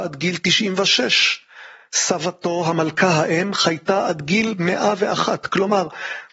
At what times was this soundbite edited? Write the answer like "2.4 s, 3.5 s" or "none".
none